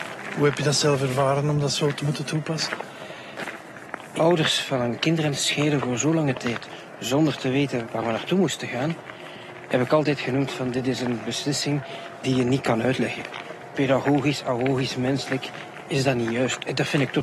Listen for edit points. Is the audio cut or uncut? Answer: cut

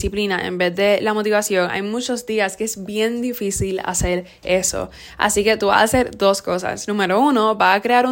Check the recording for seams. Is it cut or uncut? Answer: uncut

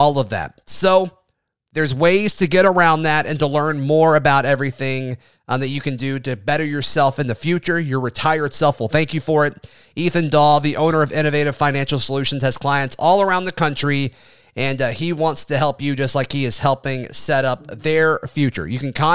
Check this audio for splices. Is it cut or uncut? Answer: uncut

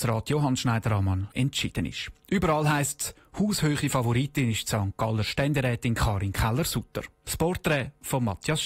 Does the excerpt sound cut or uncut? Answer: cut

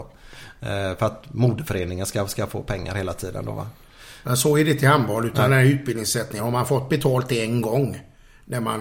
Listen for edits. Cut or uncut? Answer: uncut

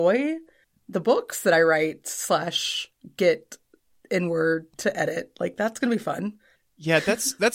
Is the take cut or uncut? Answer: cut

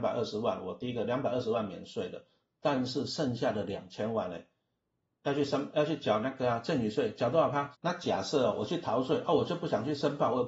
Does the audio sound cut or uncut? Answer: cut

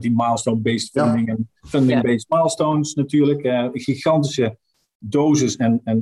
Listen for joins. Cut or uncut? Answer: uncut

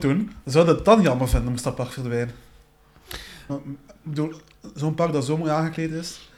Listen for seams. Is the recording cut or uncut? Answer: cut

